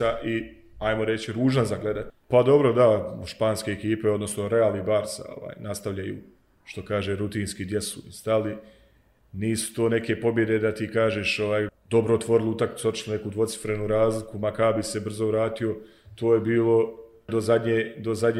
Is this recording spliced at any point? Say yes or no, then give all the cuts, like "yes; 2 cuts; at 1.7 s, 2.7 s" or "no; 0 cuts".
yes; 3 cuts; at 2.1 s, 11.7 s, 17.3 s